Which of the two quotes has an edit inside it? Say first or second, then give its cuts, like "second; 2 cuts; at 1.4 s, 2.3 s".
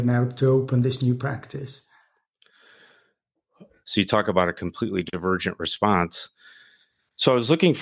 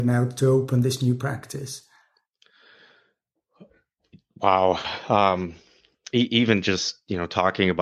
first; 1 cut; at 3.8 s